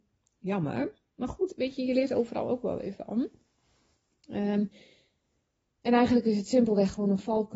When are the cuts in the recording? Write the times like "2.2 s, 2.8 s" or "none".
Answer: none